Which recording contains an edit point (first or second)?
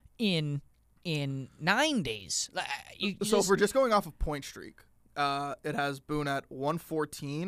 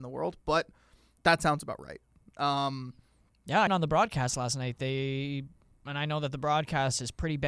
second